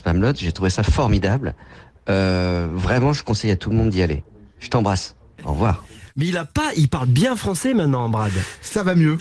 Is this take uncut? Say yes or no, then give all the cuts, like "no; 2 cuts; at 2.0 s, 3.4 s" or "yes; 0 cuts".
yes; 0 cuts